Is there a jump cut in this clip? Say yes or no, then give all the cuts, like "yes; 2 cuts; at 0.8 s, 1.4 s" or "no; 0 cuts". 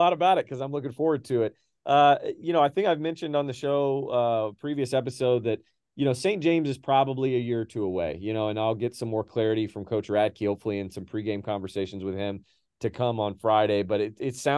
no; 0 cuts